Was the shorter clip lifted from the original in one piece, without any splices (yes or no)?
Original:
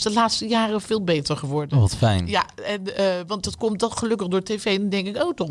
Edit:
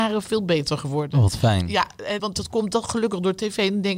no